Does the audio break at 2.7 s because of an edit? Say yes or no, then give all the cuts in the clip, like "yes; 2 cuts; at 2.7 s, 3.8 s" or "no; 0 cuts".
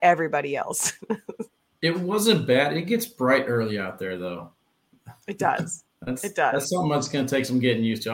no; 1 cut; at 5.9 s